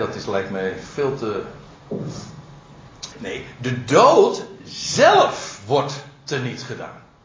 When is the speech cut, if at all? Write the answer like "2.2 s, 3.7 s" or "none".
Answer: 3.1 s